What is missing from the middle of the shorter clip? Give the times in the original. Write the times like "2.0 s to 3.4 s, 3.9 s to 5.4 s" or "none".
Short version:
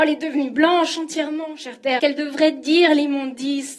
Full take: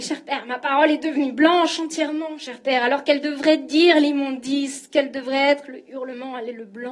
2.8 s to 3.0 s

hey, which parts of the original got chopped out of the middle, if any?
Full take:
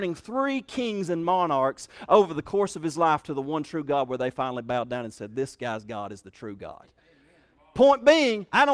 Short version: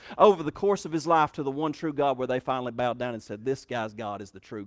none

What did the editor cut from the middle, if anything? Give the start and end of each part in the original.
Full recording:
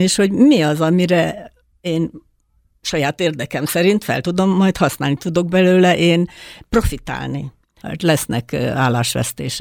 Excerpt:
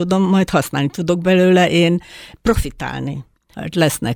none

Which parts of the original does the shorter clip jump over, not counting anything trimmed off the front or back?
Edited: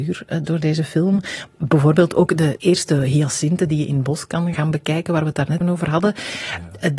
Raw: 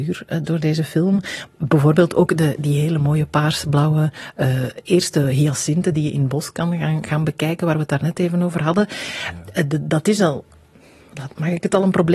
2.6 s to 4.8 s, 6.8 s to 7.1 s, 8.1 s to 8.3 s

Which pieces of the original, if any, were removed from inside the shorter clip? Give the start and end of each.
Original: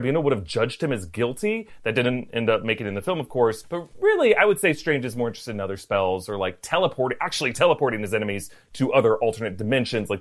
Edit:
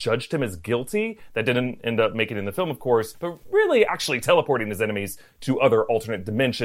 4.4 s to 7.2 s

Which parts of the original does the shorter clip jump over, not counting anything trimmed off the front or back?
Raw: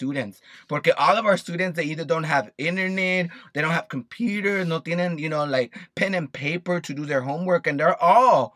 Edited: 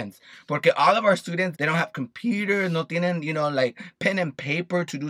1.7 s to 3.5 s

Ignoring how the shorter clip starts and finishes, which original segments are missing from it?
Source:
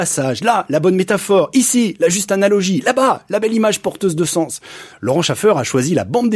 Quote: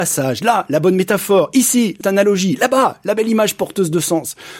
2.0 s to 2.3 s

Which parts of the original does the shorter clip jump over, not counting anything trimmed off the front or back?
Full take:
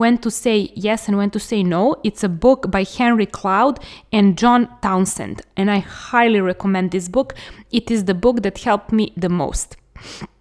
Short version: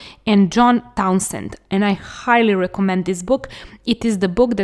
none

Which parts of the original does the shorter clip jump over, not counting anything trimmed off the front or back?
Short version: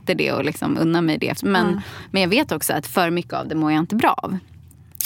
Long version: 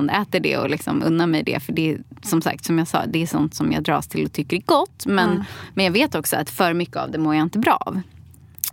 1.6 s to 5.0 s

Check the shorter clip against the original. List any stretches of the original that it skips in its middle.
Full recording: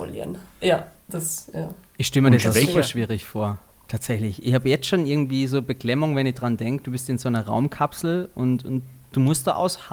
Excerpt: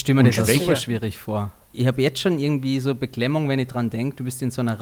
3.8 s to 4.4 s

